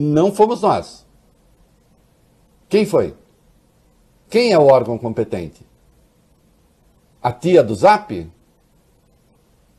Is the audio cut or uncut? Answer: uncut